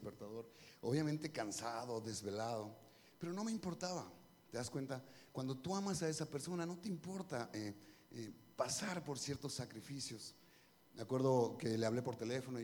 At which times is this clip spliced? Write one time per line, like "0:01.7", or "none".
none